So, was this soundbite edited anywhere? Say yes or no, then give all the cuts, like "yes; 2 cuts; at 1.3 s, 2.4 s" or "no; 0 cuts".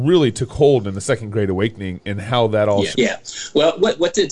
yes; 1 cut; at 2.9 s